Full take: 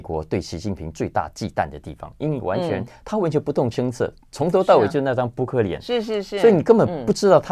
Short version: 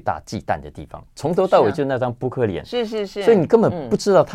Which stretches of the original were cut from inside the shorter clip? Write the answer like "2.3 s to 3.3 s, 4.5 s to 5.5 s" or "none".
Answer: 2.2 s to 4.2 s